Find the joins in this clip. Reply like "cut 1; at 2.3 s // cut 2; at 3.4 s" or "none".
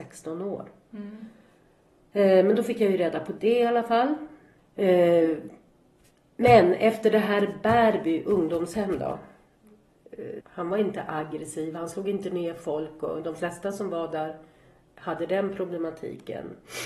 cut 1; at 4.6 s // cut 2; at 10.4 s